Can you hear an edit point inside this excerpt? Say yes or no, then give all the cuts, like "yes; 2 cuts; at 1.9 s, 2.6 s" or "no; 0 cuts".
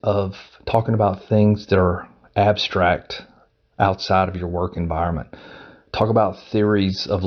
no; 0 cuts